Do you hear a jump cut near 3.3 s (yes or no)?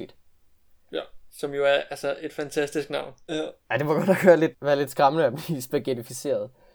yes